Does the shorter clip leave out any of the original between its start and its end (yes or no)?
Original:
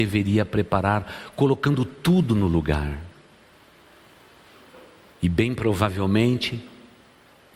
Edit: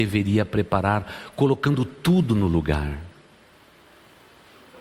no